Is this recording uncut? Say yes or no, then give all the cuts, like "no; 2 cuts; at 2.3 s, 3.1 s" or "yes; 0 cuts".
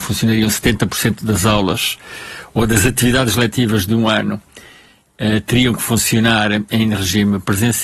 yes; 0 cuts